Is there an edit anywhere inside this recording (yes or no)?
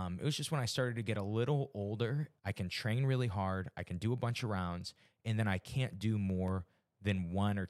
yes